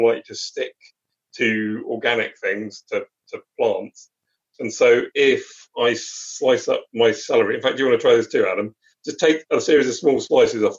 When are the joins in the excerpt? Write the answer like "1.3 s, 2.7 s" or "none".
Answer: none